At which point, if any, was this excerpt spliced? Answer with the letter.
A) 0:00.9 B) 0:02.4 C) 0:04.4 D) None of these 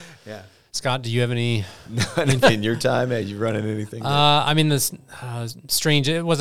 B